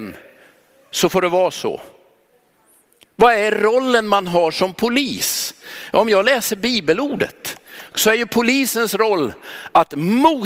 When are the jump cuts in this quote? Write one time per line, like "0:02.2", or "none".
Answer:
0:07.9

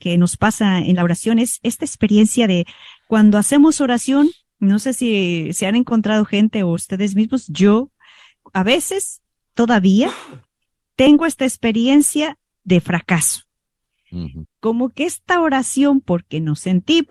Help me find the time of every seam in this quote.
0:14.4

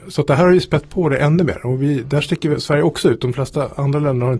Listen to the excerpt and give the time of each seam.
none

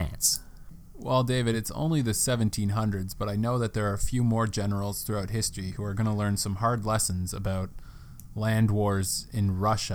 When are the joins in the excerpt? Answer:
none

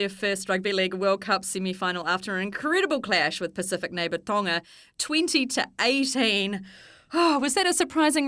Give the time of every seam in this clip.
none

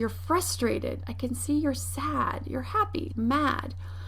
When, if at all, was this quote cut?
0:03.1

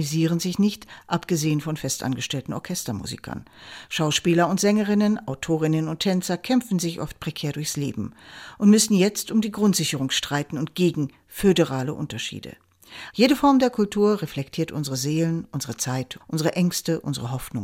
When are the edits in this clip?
0:13.1
0:16.2

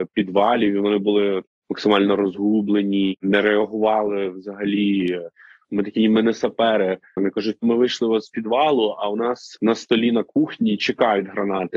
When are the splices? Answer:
0:05.6
0:07.2

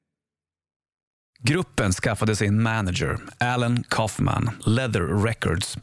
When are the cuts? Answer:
0:04.6

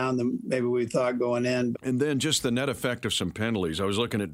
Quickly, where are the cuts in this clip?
0:01.7

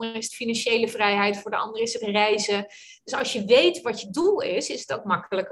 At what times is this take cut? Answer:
none

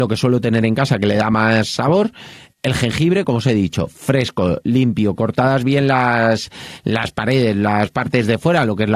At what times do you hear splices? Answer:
none

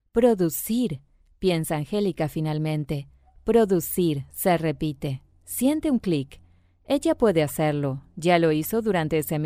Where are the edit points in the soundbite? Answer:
none

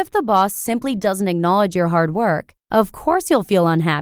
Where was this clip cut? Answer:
0:02.6

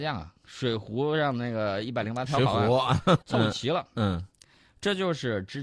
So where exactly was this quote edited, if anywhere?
0:03.2

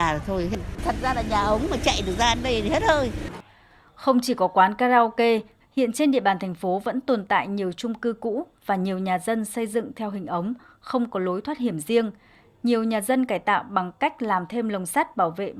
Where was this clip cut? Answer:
0:05.6

